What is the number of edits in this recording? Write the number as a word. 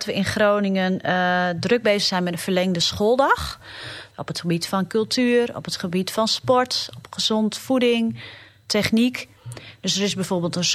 one